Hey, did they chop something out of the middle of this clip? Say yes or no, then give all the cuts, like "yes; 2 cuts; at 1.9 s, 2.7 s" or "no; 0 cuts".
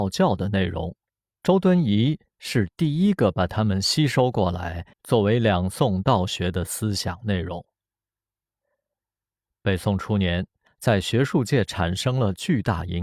yes; 2 cuts; at 4.9 s, 10.7 s